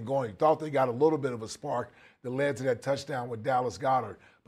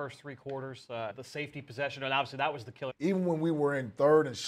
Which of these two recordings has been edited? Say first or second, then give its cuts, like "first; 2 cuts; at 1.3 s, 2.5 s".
second; 2 cuts; at 1.1 s, 2.9 s